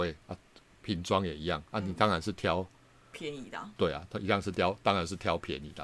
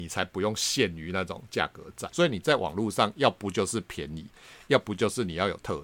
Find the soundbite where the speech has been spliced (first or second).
second